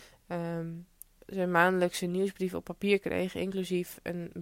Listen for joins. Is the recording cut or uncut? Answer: uncut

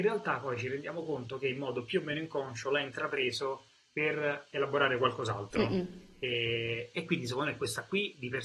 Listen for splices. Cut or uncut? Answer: uncut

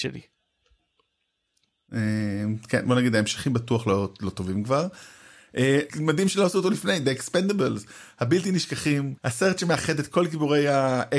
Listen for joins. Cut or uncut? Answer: cut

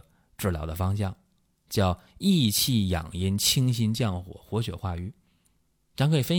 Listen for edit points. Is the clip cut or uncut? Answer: uncut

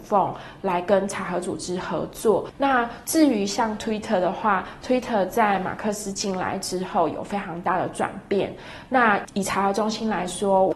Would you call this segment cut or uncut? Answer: cut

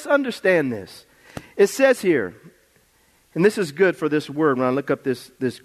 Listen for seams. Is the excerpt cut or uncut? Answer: uncut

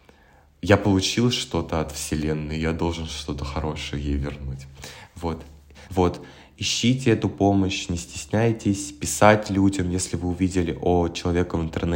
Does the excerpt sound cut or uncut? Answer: cut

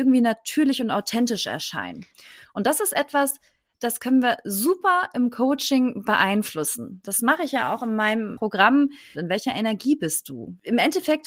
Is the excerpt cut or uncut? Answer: cut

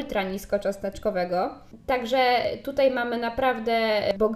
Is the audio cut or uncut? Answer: uncut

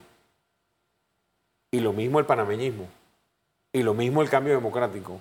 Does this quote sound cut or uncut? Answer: uncut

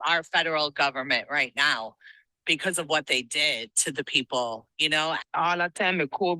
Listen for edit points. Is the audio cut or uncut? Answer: cut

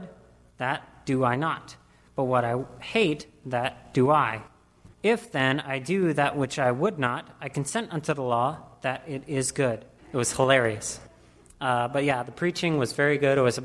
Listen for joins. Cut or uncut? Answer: cut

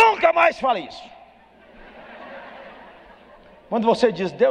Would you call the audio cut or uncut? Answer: uncut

